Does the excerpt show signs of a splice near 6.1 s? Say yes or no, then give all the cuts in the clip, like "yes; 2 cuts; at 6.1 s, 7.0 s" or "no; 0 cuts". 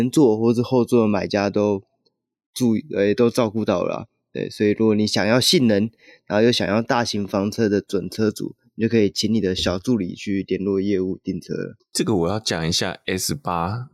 no; 1 cut; at 11.8 s